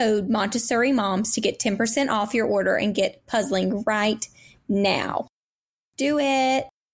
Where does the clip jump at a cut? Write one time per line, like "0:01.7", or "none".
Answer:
none